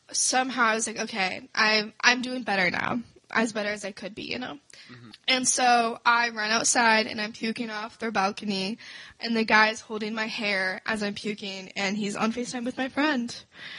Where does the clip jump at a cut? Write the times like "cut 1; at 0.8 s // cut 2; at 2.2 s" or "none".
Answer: cut 1; at 5.1 s

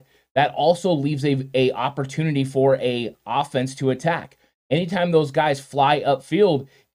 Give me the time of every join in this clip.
none

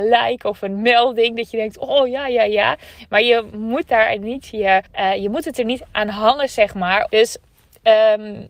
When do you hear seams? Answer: cut 1; at 4.9 s // cut 2; at 7.1 s

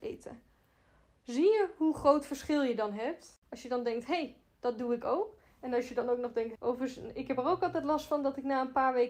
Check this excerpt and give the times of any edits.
cut 1; at 6.5 s

